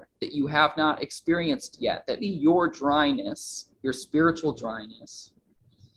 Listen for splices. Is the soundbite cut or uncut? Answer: cut